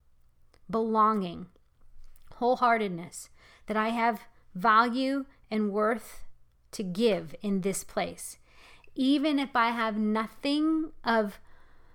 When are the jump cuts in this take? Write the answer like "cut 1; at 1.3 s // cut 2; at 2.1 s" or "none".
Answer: none